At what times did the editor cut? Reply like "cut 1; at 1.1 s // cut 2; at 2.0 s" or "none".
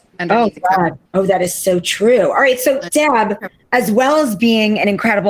none